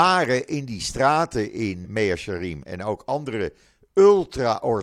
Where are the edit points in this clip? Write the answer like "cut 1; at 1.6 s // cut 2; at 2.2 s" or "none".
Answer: cut 1; at 1.8 s